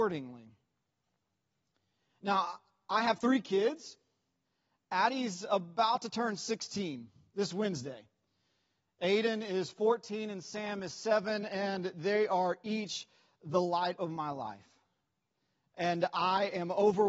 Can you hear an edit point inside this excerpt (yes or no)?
no